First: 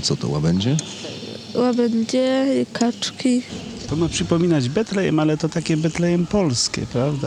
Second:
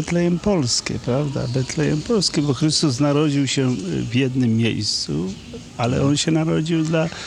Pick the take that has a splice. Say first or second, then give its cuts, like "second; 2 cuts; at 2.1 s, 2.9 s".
first; 1 cut; at 3.9 s